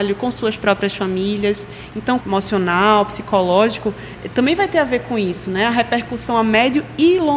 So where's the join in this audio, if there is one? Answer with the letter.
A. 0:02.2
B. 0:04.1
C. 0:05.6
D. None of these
A